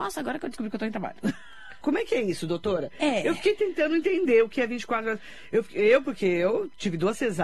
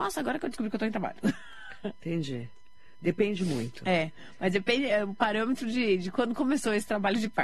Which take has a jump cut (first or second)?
first